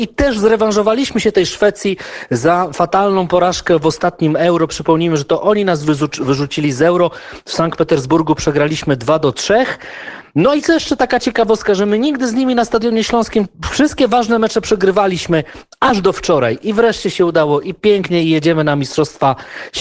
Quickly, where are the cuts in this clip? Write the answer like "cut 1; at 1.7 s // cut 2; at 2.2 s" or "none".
none